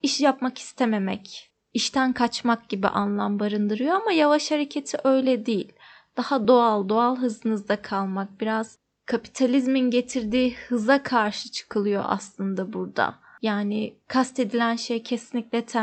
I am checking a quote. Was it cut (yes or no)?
no